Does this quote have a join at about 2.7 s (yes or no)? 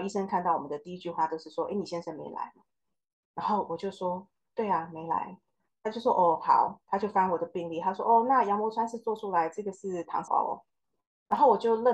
no